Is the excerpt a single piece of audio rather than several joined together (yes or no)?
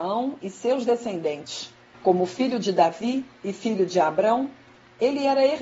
no